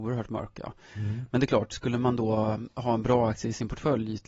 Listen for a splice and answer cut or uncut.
uncut